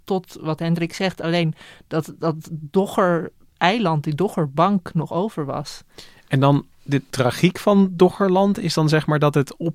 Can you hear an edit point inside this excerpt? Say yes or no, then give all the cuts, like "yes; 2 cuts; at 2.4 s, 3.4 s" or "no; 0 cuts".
no; 0 cuts